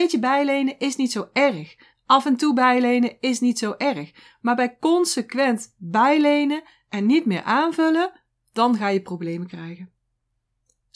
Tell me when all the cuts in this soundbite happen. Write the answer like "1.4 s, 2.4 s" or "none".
none